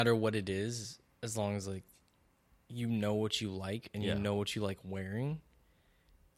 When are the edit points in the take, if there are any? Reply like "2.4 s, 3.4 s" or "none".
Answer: none